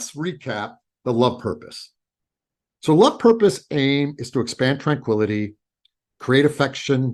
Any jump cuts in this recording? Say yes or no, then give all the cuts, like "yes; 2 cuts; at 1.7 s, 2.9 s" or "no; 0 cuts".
no; 0 cuts